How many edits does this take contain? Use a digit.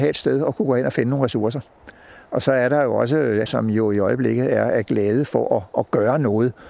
1